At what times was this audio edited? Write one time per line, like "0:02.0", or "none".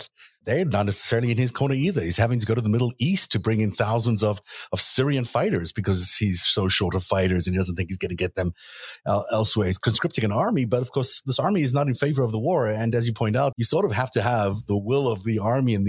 0:13.5